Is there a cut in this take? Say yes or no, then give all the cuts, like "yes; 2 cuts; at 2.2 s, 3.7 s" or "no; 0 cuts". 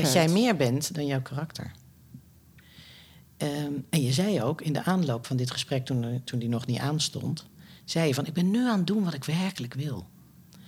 no; 0 cuts